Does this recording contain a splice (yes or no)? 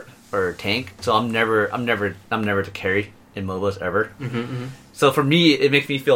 no